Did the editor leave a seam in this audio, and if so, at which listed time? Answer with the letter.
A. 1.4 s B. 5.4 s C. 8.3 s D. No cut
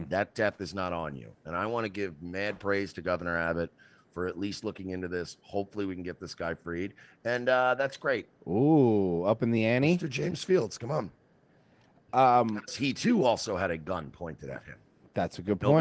C